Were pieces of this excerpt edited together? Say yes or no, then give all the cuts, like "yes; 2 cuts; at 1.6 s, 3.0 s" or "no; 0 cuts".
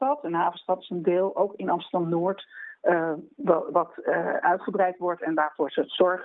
no; 0 cuts